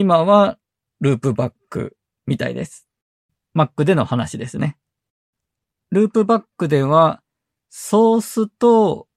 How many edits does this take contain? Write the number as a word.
zero